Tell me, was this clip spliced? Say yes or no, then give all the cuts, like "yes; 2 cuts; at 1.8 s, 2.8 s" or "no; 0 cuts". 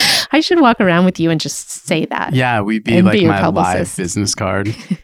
no; 0 cuts